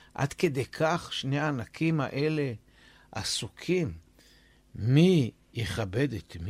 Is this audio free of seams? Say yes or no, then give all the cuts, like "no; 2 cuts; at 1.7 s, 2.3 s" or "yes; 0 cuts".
yes; 0 cuts